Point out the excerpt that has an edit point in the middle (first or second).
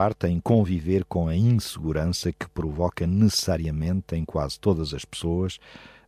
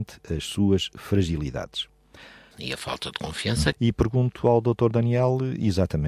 second